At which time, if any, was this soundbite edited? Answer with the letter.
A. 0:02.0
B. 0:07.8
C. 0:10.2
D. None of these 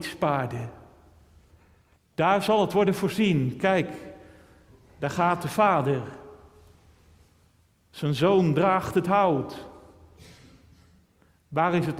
A